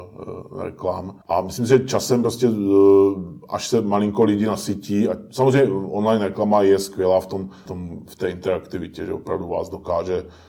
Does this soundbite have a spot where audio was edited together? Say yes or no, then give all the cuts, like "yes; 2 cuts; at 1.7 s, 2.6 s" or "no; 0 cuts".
yes; 2 cuts; at 1.2 s, 7.7 s